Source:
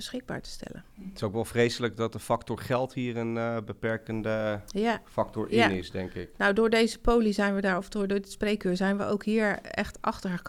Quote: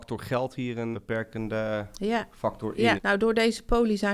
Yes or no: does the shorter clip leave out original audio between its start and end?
yes